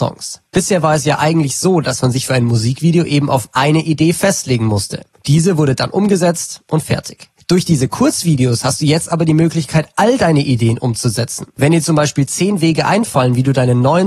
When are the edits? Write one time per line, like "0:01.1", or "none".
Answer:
none